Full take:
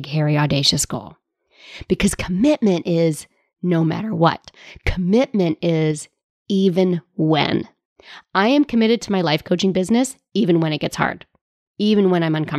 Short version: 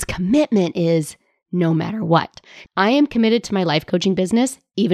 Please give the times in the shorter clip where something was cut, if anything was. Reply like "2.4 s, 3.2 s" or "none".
2.7 s